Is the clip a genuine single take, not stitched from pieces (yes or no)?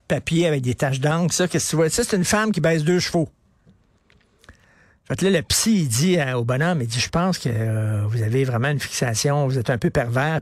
yes